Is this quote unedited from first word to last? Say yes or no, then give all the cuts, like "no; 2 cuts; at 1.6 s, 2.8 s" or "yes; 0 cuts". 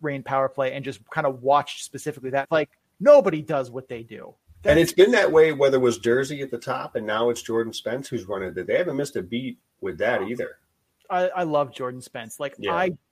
no; 1 cut; at 2.4 s